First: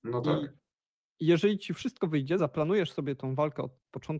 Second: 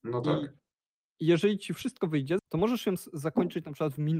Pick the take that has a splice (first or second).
second